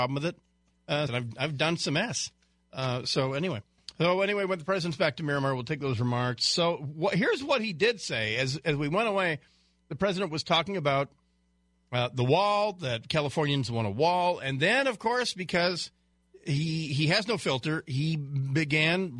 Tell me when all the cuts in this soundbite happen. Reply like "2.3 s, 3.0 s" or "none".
1.1 s